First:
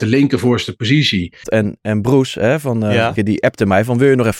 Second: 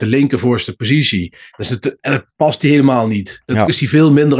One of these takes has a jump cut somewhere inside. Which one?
first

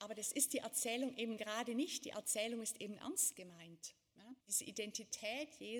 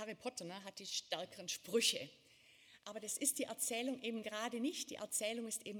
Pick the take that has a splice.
first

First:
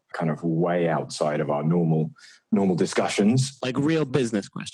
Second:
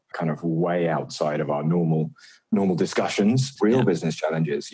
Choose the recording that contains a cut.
second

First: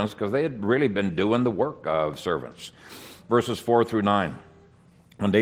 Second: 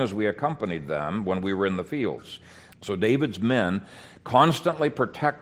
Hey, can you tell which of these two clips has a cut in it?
second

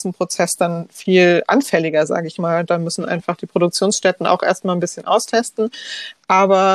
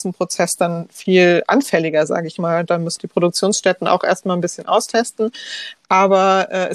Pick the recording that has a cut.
second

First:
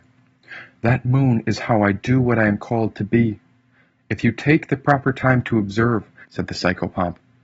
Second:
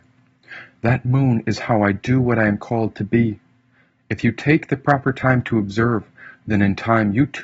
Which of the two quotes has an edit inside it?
first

